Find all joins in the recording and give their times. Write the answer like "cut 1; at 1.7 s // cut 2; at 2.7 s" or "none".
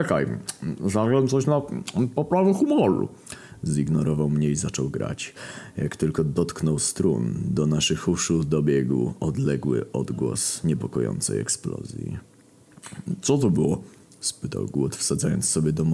none